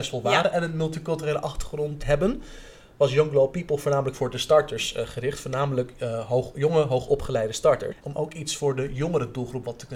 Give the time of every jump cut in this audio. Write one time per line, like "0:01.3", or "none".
0:02.0
0:08.0